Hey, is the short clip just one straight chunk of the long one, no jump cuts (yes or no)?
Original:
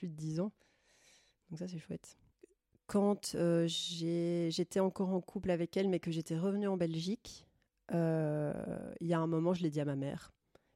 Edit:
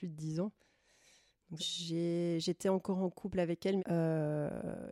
no